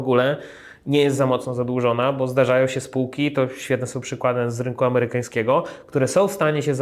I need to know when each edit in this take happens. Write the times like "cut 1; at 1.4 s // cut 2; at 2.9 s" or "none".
none